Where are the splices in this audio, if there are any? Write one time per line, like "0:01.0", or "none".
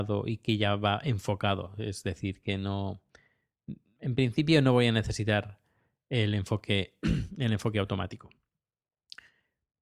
none